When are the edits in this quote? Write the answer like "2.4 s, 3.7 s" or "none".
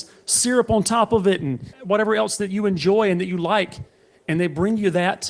1.7 s